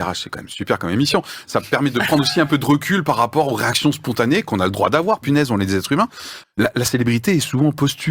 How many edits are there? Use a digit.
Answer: 1